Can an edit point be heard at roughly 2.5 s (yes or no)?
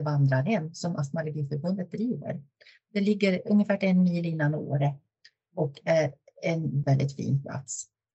no